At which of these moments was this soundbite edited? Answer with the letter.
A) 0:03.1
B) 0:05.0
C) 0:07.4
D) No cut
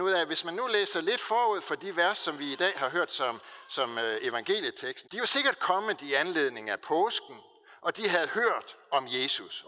B